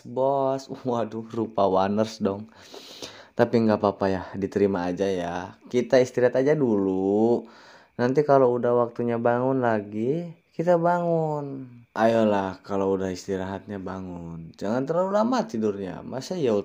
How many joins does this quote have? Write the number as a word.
two